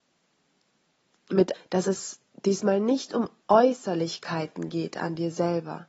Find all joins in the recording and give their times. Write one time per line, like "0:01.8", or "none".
0:01.5